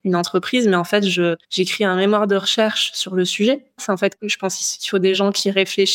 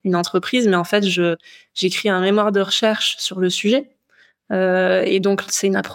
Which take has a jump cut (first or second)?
first